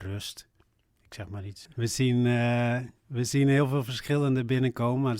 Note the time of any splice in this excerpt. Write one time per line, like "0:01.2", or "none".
0:01.7